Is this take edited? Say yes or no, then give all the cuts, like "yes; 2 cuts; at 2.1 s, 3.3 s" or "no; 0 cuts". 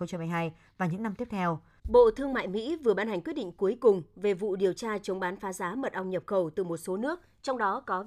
yes; 1 cut; at 1.8 s